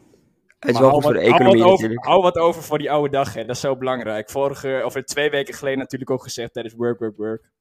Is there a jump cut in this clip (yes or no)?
no